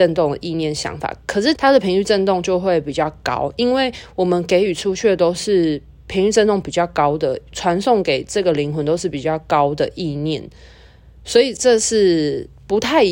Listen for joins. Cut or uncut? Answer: cut